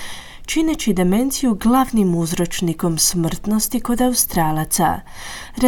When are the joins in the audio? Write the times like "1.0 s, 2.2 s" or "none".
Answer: none